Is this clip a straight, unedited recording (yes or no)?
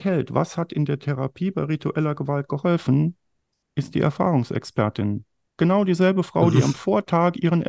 yes